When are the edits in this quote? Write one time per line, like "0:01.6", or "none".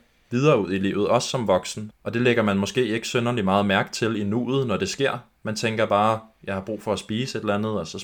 0:01.9